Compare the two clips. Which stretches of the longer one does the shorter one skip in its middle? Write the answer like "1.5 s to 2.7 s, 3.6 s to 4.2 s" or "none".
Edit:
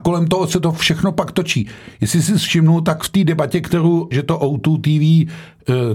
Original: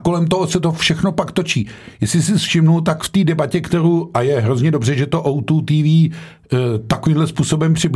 4.1 s to 4.9 s